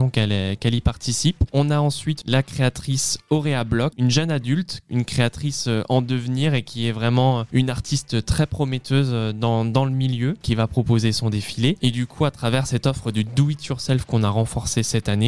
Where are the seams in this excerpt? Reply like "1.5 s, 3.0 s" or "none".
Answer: 1.5 s, 11.8 s